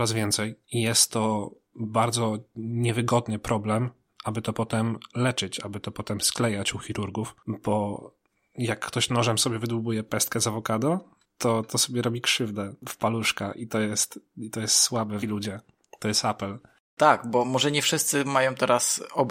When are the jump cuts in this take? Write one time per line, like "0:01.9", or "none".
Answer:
0:15.2

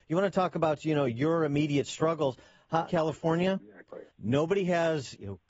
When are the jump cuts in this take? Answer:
0:02.9
0:04.1

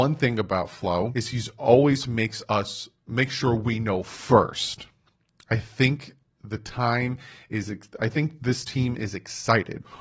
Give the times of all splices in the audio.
0:01.1

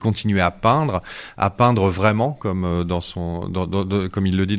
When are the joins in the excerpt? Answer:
none

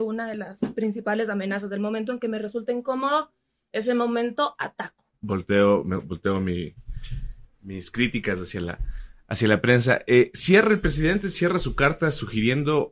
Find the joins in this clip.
none

